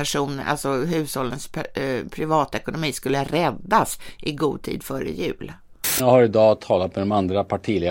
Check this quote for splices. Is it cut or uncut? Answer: uncut